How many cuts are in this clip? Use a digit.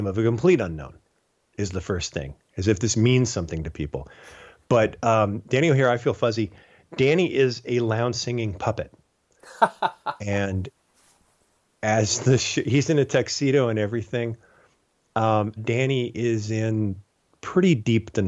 1